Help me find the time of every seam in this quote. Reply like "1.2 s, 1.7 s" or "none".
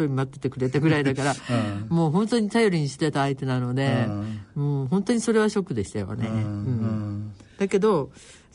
none